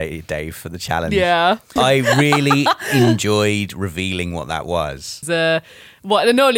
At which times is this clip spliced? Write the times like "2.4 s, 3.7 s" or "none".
1.8 s, 5.2 s